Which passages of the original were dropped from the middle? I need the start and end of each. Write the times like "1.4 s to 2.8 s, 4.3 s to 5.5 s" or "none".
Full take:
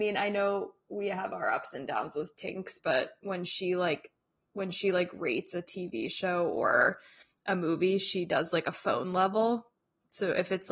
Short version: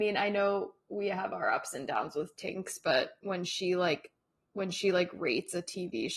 none